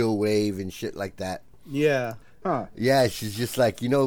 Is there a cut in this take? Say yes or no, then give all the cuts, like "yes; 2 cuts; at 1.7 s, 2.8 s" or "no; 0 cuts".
yes; 1 cut; at 2.4 s